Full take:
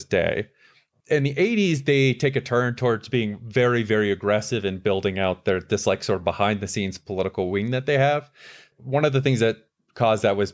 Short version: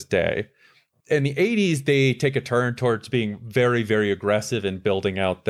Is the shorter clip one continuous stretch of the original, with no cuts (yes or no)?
yes